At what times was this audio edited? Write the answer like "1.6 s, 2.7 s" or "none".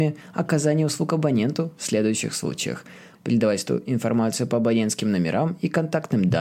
3.1 s